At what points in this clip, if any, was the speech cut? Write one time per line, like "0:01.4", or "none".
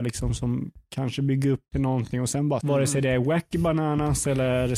0:02.6